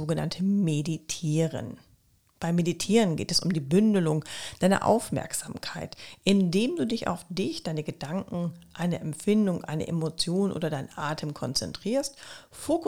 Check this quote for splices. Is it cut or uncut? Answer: uncut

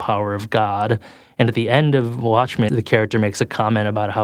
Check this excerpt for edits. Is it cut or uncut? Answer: cut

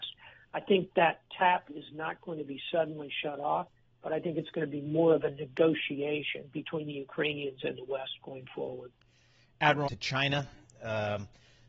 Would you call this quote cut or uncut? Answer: cut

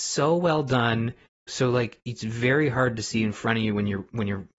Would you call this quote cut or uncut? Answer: cut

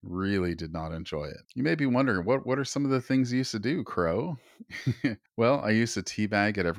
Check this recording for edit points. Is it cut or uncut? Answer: uncut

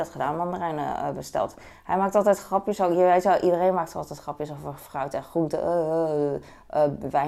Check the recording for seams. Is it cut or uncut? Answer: uncut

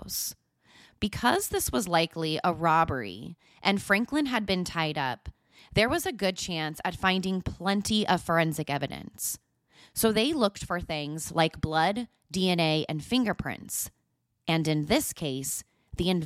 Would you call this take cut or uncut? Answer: uncut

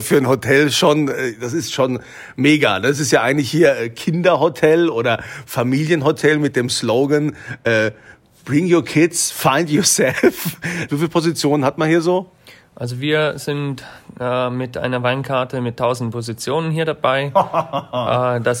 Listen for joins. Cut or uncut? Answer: cut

